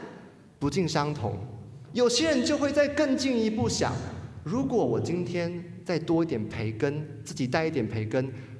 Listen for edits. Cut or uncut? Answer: cut